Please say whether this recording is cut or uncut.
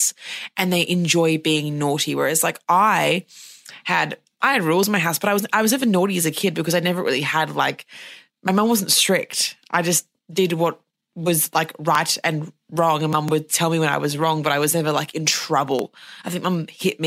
uncut